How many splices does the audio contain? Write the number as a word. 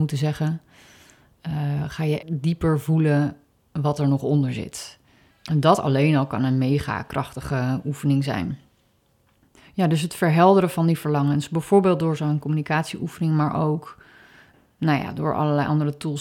one